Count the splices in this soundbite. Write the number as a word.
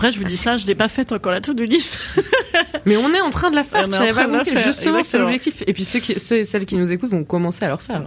zero